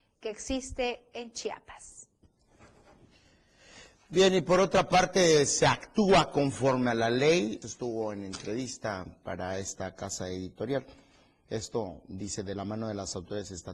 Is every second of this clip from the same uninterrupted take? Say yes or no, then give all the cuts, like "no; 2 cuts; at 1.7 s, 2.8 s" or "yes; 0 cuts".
no; 1 cut; at 7.6 s